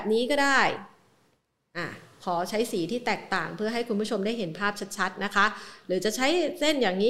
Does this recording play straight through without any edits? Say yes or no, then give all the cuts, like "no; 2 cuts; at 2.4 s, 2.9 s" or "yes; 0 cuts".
yes; 0 cuts